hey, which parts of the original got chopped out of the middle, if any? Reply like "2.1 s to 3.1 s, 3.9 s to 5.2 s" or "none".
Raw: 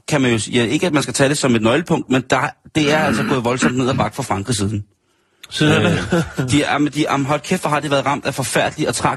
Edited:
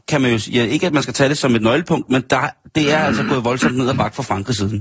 none